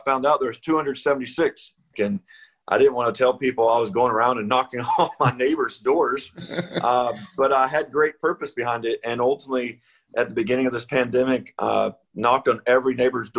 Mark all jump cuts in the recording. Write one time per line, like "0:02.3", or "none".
0:01.9